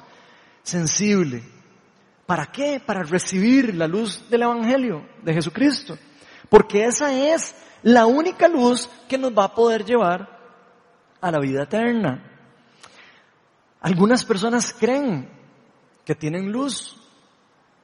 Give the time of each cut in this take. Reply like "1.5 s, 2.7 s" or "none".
none